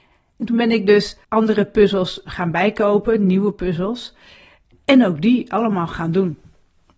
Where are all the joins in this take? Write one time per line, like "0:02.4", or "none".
0:01.2

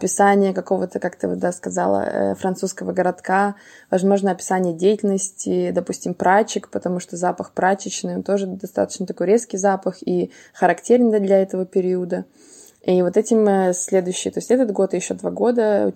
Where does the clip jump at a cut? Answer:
none

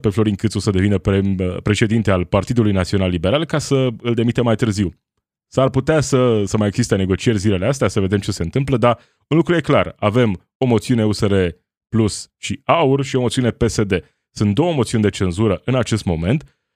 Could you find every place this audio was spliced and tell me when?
none

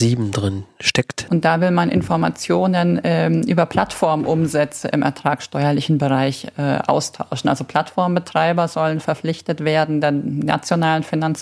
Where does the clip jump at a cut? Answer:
0:01.3

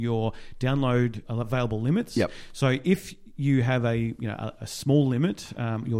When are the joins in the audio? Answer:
none

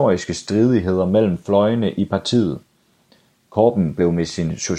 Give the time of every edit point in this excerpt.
none

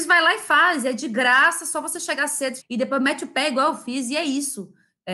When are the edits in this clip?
0:02.6

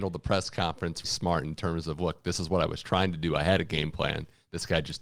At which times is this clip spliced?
0:01.0

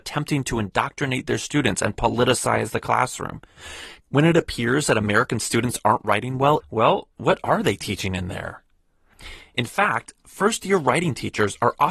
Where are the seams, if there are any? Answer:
0:04.0
0:06.6

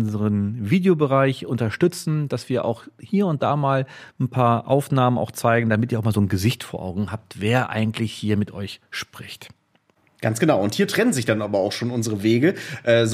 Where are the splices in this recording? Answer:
none

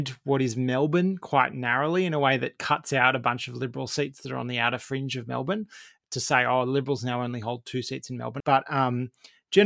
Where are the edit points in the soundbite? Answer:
0:08.4

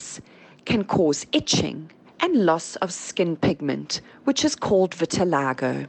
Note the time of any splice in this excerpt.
0:02.0

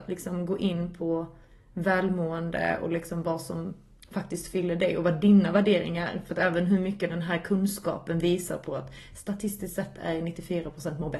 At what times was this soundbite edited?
none

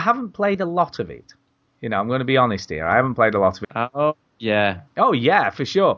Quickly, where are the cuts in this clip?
0:03.6
0:04.9

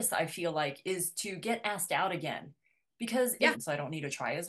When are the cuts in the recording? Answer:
0:03.5

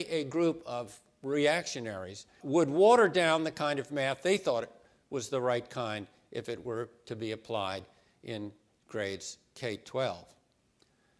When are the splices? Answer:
0:02.4

